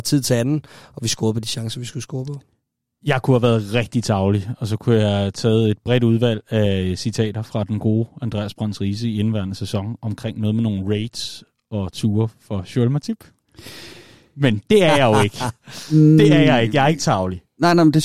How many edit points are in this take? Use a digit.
0